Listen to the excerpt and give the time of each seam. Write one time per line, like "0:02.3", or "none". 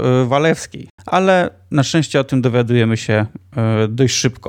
0:01.0